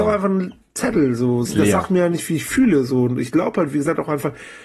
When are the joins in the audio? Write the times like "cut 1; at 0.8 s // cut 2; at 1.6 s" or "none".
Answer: cut 1; at 1.4 s